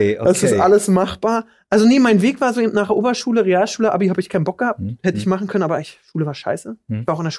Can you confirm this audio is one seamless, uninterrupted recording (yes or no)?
yes